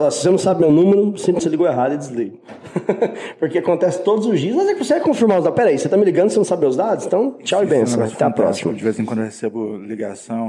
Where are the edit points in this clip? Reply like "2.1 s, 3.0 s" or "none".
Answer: 1.4 s

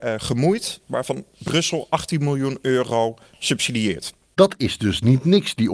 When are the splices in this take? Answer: none

